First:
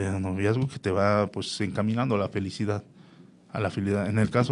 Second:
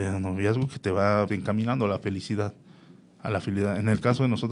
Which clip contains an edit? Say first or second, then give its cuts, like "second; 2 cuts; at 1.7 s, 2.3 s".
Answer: second; 1 cut; at 1.3 s